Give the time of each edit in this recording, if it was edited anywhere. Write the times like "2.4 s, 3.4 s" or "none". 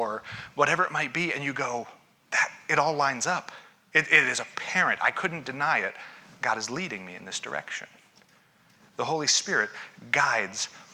none